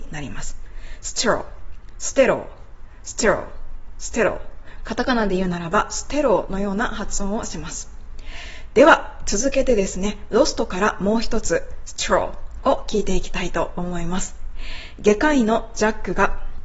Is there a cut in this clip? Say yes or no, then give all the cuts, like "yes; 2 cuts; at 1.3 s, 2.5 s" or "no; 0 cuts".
yes; 1 cut; at 4.8 s